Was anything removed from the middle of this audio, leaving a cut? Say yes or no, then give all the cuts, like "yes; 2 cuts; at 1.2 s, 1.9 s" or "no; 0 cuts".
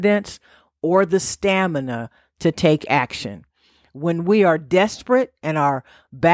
no; 0 cuts